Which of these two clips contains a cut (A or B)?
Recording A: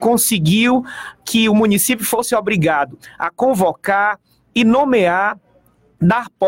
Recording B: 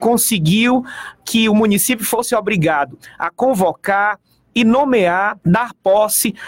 B